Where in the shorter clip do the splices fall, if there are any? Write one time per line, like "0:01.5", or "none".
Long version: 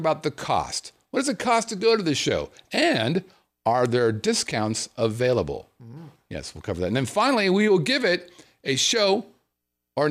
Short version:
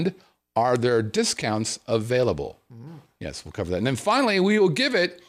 none